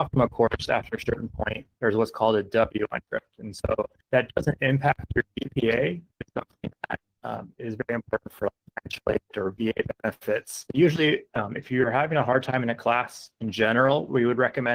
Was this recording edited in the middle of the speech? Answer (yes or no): yes